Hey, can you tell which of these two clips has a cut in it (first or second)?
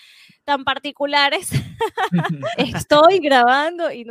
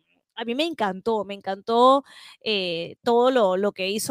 first